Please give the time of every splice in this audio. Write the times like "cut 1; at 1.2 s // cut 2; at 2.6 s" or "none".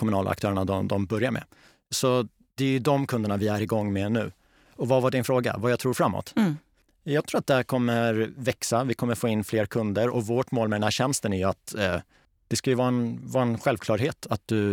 none

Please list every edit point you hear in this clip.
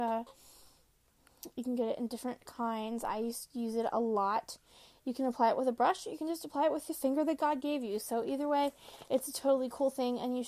none

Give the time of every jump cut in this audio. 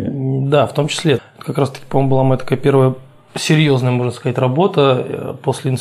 cut 1; at 1.2 s

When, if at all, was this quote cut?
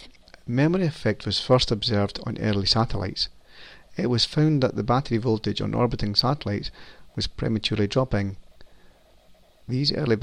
none

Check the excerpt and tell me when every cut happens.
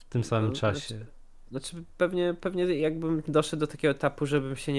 none

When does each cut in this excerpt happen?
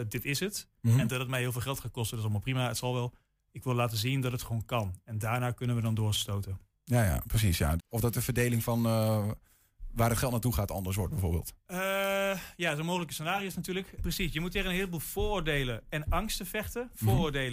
cut 1; at 7.8 s // cut 2; at 14.0 s

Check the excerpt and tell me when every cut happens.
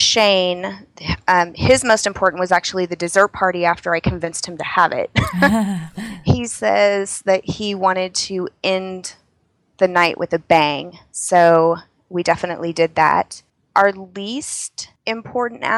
none

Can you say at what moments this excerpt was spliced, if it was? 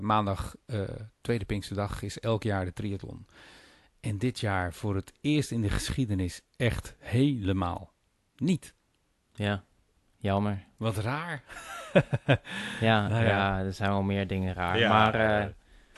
none

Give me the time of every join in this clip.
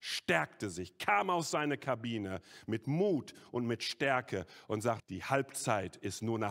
cut 1; at 5.0 s

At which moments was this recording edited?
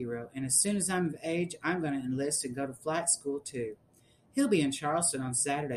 none

